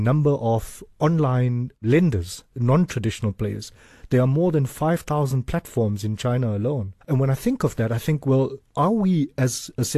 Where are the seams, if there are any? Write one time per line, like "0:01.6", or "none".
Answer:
0:02.5
0:07.0